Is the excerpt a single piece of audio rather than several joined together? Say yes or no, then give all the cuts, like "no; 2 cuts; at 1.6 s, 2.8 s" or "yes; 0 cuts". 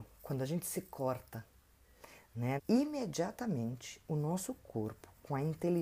no; 1 cut; at 2.6 s